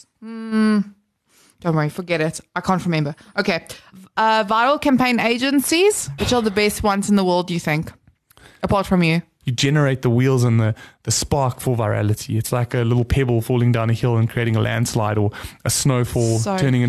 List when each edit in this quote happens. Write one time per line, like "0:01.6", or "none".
0:06.2
0:09.4